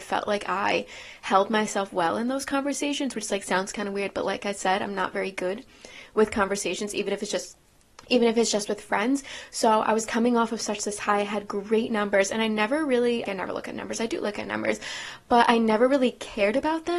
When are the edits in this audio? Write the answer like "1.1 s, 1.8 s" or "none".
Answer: 13.3 s